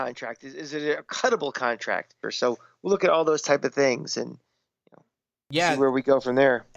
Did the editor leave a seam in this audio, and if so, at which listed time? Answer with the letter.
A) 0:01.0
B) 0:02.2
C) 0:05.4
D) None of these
B